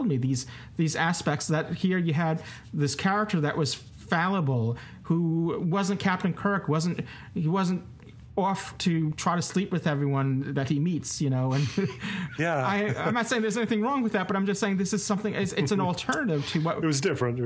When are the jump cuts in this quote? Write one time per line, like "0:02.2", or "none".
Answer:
0:12.3